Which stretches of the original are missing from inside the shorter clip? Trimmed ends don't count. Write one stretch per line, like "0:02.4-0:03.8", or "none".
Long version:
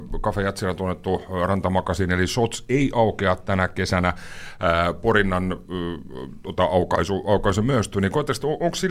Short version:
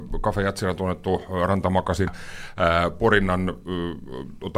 0:02.1-0:04.1